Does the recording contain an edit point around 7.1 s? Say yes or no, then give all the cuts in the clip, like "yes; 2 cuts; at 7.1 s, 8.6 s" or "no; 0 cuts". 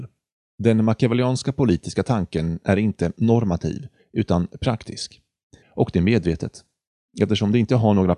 no; 1 cut; at 5.6 s